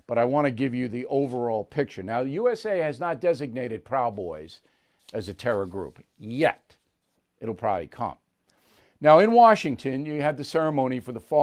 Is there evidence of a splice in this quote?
no; 0 cuts

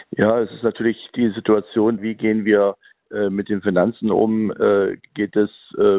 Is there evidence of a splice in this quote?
yes; 1 cut; at 2.0 s

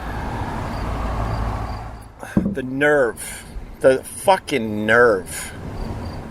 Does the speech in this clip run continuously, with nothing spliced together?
yes; 0 cuts

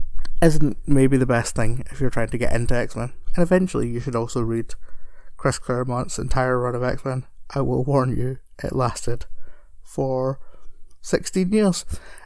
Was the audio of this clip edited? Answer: no; 0 cuts

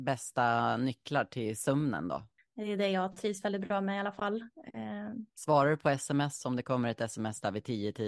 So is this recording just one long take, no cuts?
no; 2 cuts; at 2.4 s, 5.3 s

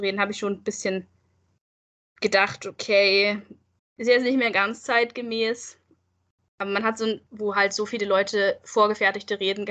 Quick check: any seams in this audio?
yes; 2 cuts; at 3.8 s, 7.3 s

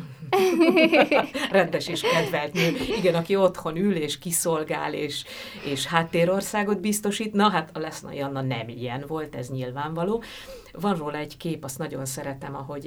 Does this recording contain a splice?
no; 0 cuts

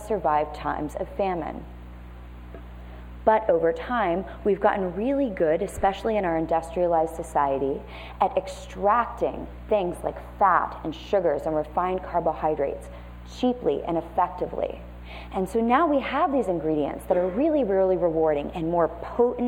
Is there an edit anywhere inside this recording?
no; 0 cuts

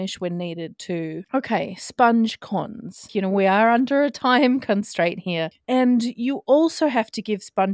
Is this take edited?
yes; 3 cuts; at 1.2 s, 3.1 s, 5.5 s

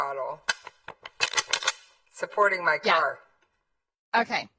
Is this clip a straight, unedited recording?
yes; 0 cuts

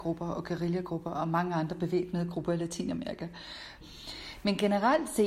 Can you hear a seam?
yes; 1 cut; at 3.8 s

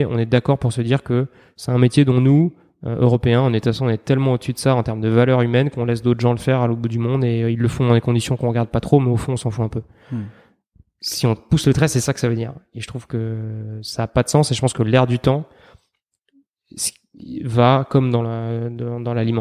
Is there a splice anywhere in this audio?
no; 0 cuts

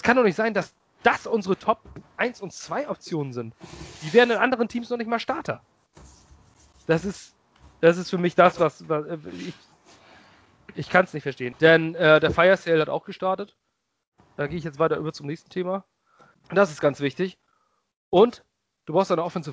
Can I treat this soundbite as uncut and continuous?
no; 2 cuts; at 11.5 s, 16.4 s

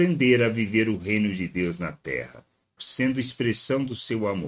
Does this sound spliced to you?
yes; 1 cut; at 2.8 s

